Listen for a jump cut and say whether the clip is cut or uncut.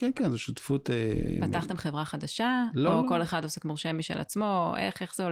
uncut